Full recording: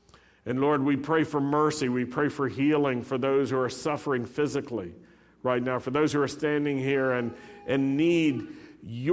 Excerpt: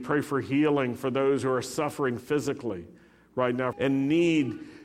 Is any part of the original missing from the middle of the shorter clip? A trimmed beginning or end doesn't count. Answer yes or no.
yes